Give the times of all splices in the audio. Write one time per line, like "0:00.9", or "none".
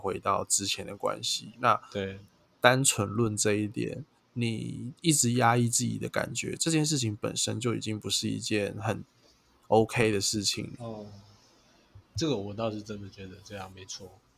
none